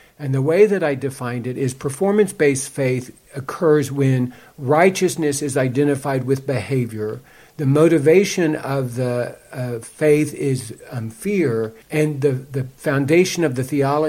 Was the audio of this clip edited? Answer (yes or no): yes